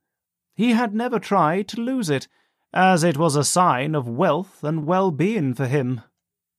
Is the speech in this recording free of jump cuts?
yes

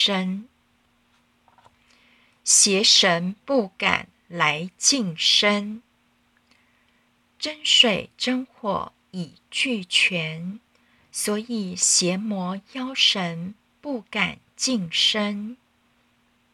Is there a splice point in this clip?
no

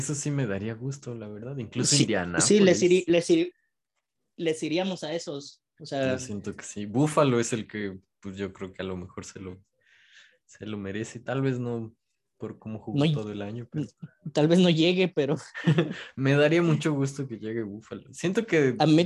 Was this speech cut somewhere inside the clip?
no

